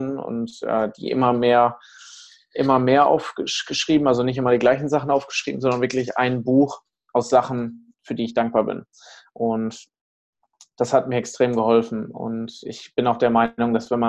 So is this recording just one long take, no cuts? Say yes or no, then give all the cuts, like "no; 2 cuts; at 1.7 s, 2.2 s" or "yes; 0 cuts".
yes; 0 cuts